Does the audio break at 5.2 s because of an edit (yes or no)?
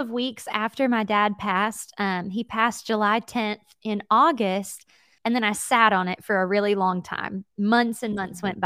yes